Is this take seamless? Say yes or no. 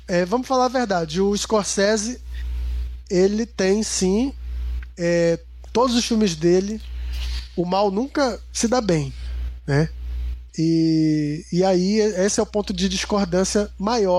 no